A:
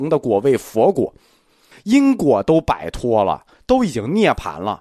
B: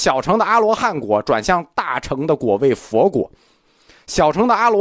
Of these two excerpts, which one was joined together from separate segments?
A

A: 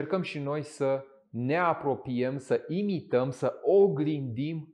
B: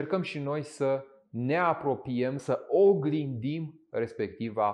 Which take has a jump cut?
B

